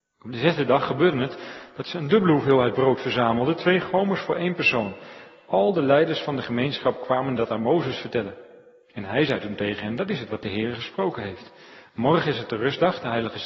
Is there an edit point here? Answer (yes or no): no